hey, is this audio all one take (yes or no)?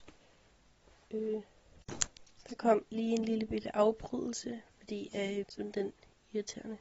no